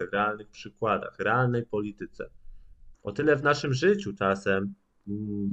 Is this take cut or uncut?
cut